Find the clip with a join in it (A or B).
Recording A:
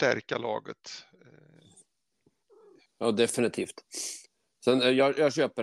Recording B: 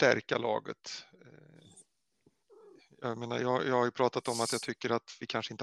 A